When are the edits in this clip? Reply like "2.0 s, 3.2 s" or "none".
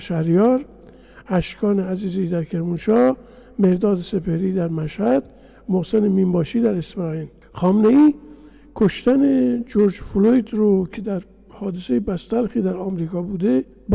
none